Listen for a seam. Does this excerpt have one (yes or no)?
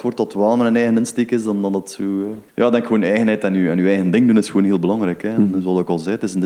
yes